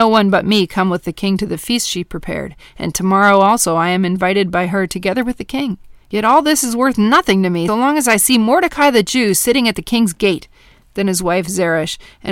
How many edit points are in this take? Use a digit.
2